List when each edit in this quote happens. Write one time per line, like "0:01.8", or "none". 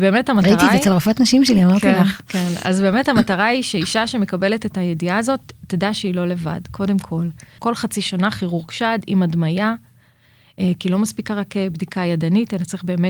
0:07.6